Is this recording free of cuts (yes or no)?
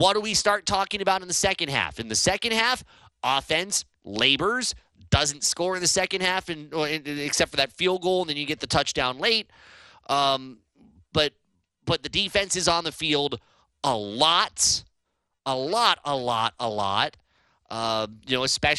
yes